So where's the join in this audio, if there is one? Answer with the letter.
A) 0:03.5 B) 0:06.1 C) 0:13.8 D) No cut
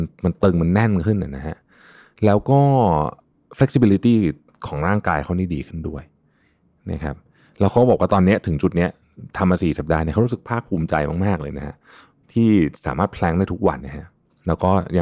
C